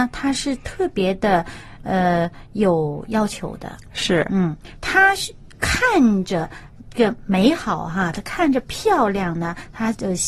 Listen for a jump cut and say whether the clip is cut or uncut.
uncut